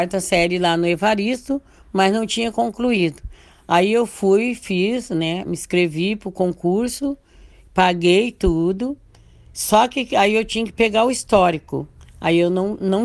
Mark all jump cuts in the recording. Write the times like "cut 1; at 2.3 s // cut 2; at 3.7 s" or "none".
none